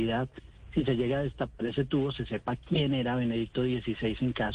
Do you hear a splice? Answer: no; 0 cuts

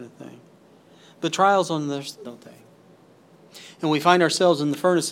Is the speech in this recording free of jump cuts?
no; 1 cut; at 2.2 s

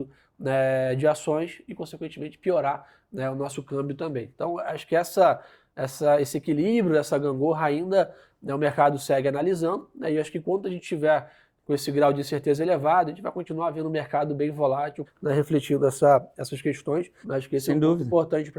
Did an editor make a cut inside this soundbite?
yes; 2 cuts; at 15.1 s, 17.2 s

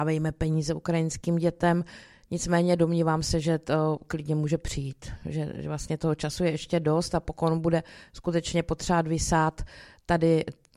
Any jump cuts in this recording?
no; 0 cuts

